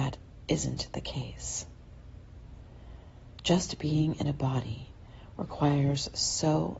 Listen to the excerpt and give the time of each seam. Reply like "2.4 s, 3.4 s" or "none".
none

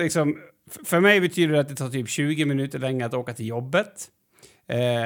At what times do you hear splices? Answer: none

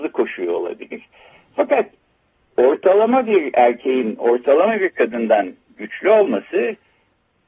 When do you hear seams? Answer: none

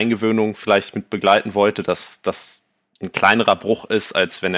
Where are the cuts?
none

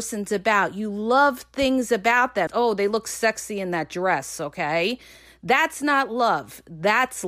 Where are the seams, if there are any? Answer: 2.5 s

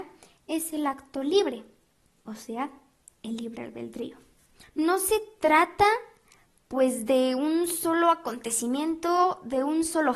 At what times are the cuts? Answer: 4.6 s

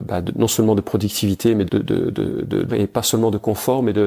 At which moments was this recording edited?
1.7 s, 2.7 s

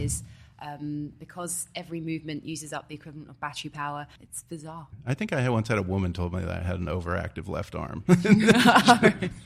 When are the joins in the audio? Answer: 4.2 s

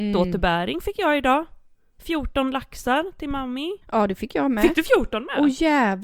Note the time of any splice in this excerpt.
3.8 s

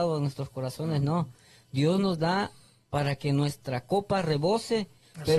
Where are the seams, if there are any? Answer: none

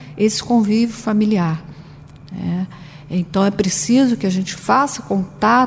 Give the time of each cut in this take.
none

